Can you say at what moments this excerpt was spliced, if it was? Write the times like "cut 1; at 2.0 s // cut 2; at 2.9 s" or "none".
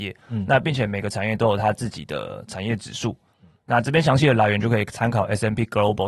none

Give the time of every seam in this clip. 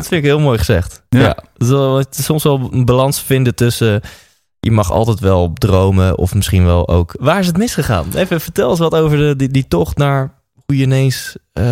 cut 1; at 7.2 s

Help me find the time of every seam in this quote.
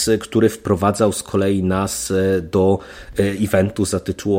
none

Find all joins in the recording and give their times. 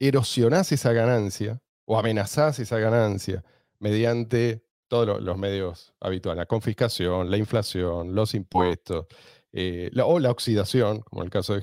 none

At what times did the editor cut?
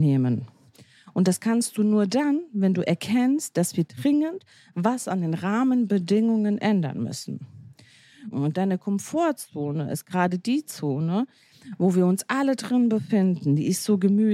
cut 1; at 8.3 s

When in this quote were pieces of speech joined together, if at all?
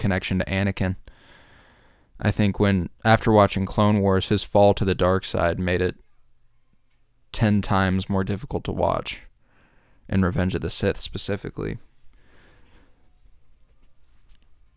none

